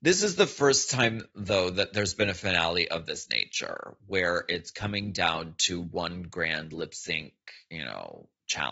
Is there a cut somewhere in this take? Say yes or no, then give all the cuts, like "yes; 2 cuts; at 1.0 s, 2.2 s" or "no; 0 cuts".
no; 0 cuts